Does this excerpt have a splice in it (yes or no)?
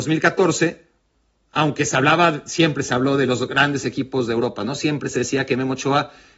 no